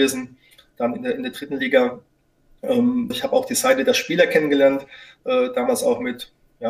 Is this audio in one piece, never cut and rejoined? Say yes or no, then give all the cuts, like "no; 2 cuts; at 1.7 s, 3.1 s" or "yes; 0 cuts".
no; 1 cut; at 3.1 s